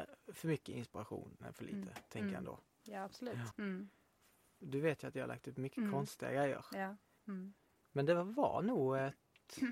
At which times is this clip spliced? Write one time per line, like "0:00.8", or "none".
0:03.5
0:07.2